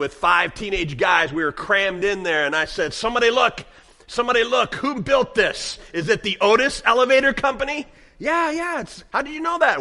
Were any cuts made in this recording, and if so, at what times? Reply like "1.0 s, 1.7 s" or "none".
none